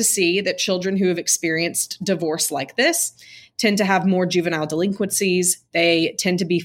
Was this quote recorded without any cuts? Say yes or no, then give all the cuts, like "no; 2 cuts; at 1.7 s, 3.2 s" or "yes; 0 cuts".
yes; 0 cuts